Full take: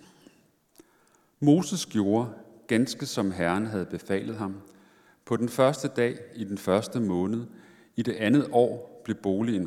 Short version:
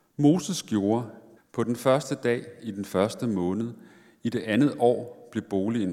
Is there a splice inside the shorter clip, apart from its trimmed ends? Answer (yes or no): yes